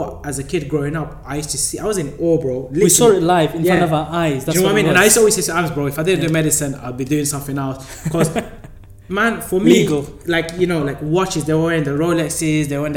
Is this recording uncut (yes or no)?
yes